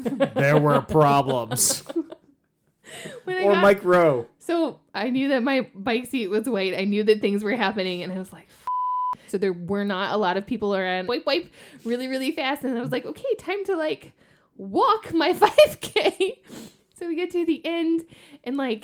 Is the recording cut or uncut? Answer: cut